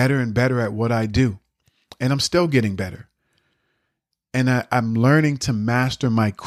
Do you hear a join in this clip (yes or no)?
no